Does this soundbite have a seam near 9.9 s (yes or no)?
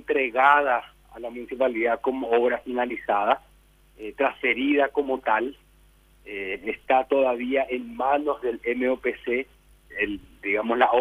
yes